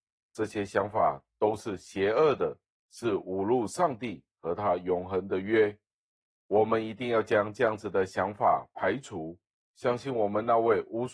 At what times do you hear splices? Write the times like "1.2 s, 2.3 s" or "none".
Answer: none